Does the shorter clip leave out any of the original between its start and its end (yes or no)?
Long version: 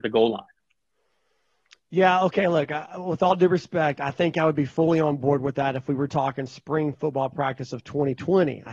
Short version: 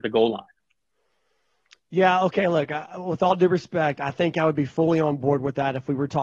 no